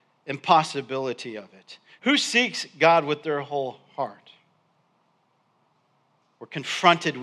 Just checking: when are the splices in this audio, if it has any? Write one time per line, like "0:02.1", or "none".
0:02.0